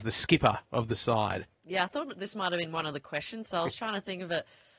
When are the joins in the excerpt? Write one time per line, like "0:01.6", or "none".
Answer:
0:01.5